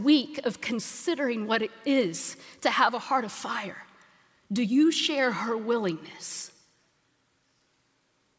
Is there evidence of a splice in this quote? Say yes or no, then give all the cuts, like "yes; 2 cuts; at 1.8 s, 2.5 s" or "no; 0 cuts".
no; 0 cuts